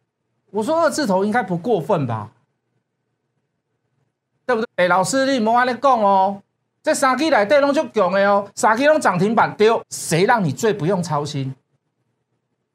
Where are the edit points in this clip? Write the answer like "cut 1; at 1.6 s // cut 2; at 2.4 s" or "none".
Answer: cut 1; at 4.6 s // cut 2; at 9.8 s